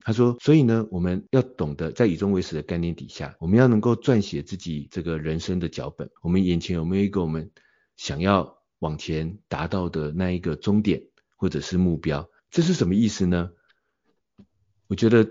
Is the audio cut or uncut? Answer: cut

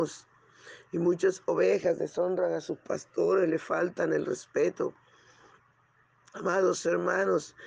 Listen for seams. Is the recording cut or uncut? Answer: uncut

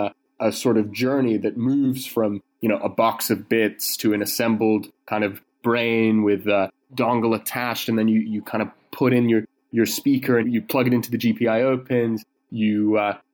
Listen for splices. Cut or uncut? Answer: cut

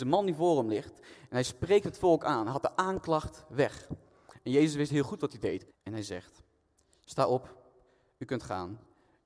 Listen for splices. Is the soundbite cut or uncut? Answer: cut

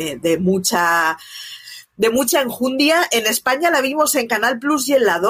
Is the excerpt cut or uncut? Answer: uncut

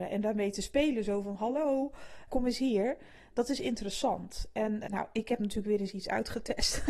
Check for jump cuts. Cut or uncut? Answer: cut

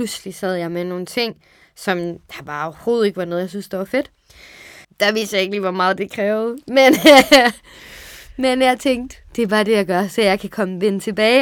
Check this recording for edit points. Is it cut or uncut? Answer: cut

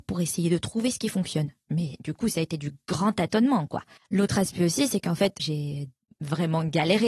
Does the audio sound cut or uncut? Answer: cut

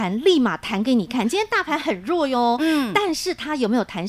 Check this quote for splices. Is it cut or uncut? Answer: uncut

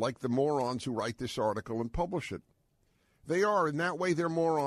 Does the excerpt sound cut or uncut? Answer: uncut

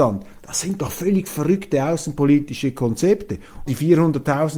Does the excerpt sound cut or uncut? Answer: cut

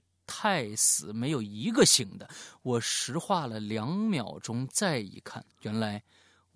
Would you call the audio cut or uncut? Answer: cut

